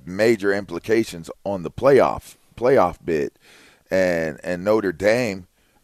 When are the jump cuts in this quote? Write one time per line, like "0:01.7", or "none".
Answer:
0:01.3